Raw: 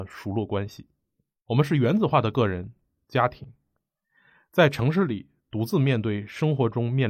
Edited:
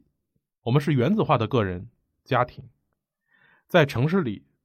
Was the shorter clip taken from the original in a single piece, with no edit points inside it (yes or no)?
yes